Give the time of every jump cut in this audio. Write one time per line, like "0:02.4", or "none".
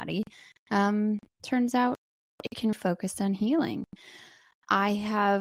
0:02.7